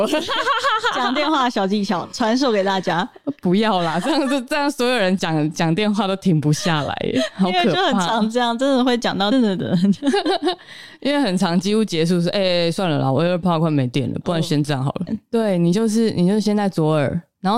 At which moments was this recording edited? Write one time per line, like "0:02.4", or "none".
0:09.3
0:15.1